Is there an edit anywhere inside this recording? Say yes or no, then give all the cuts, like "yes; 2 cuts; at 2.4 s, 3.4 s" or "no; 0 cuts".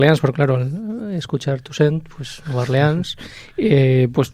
no; 0 cuts